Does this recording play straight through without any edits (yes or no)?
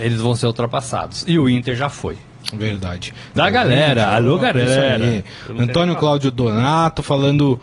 no